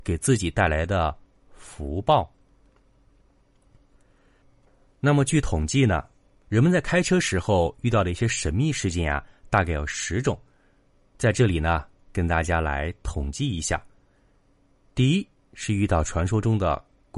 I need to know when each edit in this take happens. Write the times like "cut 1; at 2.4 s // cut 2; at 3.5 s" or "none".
none